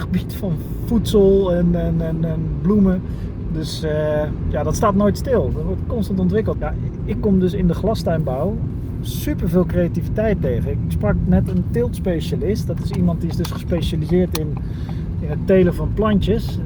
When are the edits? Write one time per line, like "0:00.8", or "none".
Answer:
0:06.5